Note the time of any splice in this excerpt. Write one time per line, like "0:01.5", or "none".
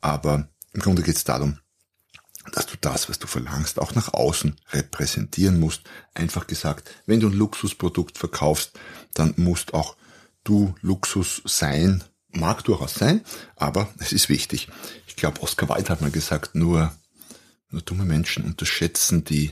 0:12.3